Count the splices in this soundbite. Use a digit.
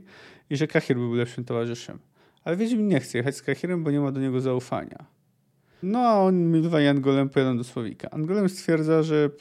1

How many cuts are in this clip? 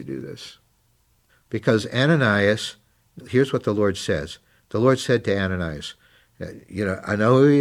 2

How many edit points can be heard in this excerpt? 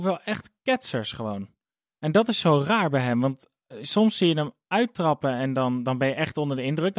0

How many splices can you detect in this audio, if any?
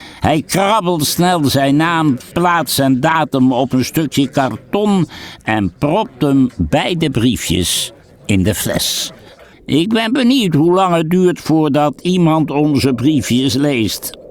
2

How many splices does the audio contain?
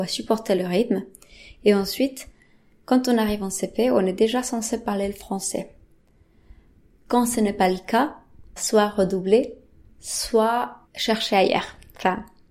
2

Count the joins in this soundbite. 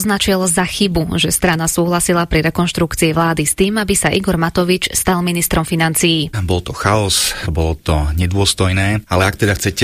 2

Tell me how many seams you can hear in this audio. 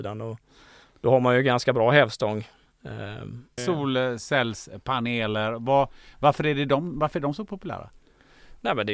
1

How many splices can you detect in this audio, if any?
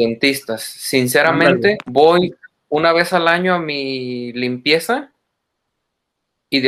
1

